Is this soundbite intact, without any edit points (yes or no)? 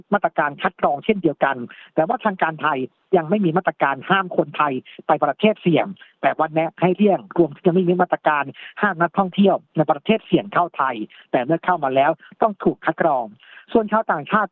yes